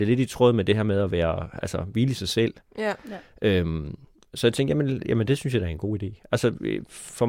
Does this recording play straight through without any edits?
yes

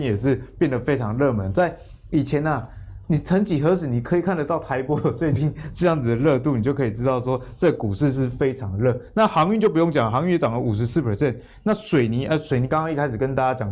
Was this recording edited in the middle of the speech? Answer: no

